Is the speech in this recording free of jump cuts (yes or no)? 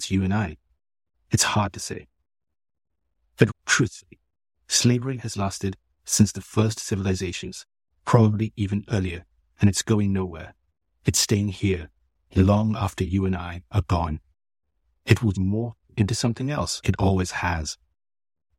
no